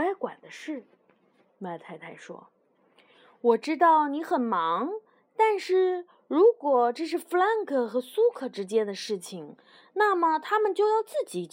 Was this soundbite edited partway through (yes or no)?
no